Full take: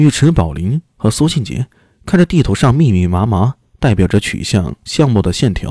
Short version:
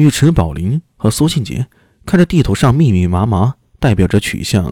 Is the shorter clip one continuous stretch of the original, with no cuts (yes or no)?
yes